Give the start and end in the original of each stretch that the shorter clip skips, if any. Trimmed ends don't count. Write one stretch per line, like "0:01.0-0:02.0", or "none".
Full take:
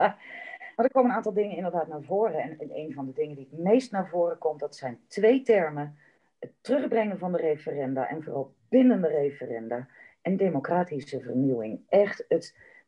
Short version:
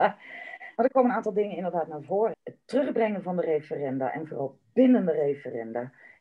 0:02.3-0:06.3